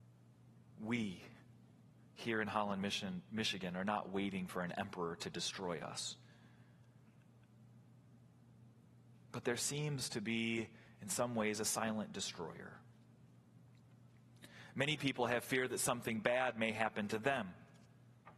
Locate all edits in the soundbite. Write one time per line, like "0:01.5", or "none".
none

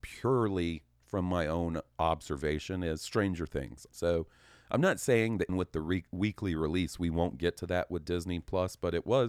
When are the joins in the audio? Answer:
0:03.9
0:05.5

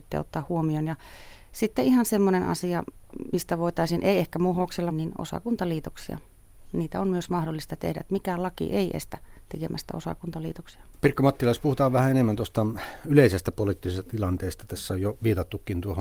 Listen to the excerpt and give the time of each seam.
0:04.9
0:10.9

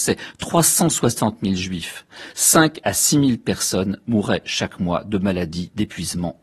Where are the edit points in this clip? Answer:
none

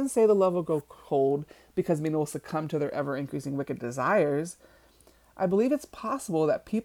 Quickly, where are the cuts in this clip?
none

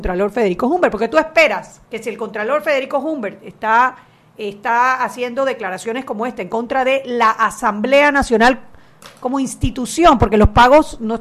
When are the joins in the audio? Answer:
0:01.8

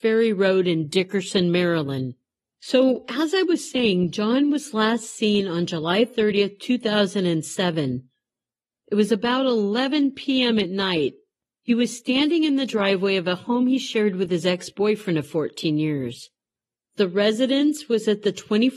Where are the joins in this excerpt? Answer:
0:02.5

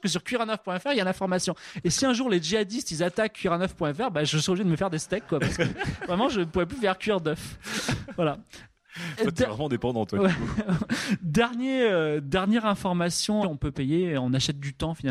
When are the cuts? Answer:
0:13.4

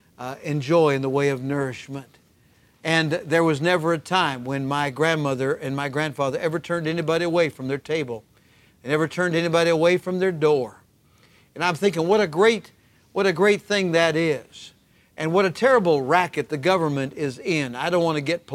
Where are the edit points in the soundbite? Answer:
none

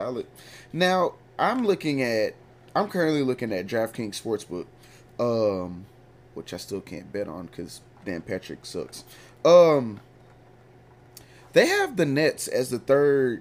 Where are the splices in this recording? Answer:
none

